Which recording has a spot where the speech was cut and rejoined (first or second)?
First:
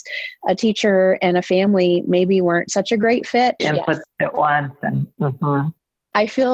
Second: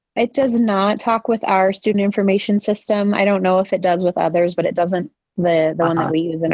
first